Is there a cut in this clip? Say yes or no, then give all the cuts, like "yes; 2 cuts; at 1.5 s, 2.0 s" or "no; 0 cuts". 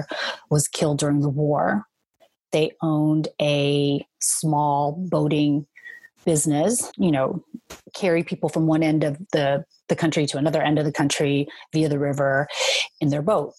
yes; 2 cuts; at 6.9 s, 9.3 s